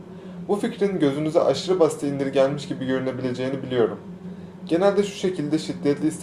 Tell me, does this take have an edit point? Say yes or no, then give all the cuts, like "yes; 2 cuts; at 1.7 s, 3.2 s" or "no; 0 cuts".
yes; 1 cut; at 4.6 s